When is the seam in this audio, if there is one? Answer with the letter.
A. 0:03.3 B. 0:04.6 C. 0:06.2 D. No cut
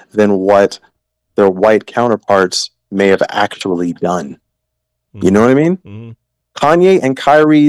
D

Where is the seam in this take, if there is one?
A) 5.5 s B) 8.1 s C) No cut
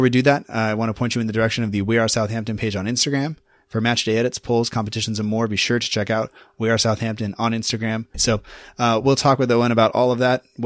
B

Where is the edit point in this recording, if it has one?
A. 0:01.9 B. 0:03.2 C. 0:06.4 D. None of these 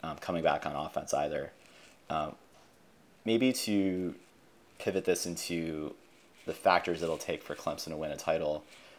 D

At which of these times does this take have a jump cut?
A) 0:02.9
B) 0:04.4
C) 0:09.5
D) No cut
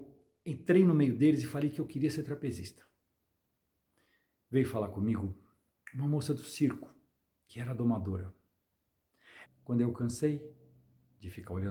C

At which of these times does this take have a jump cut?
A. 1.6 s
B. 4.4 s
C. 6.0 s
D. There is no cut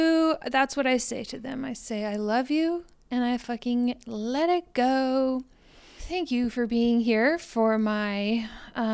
C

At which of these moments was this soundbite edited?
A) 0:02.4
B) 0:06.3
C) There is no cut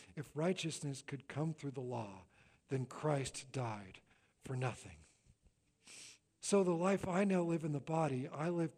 B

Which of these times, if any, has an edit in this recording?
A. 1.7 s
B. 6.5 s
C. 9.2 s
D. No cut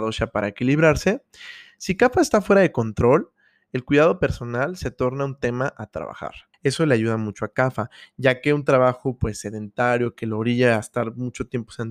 B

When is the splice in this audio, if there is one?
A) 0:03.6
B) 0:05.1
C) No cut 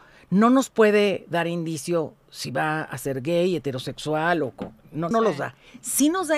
B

